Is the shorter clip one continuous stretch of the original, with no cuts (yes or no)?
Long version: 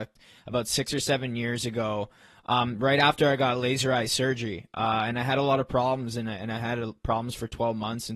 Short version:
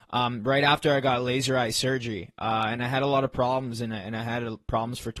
yes